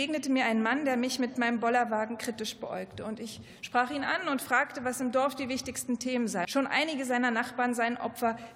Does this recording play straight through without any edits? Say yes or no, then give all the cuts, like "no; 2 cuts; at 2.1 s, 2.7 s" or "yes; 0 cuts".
no; 1 cut; at 6.4 s